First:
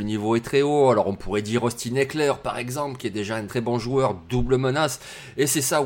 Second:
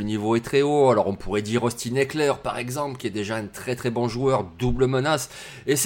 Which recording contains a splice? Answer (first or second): first